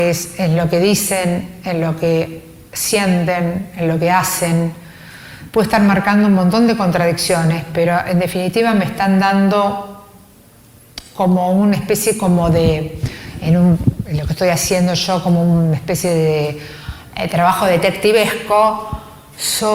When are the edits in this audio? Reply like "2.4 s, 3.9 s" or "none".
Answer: none